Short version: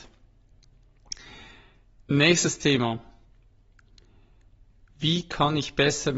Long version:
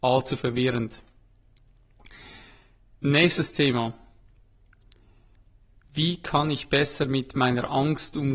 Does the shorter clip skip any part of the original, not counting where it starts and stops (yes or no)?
no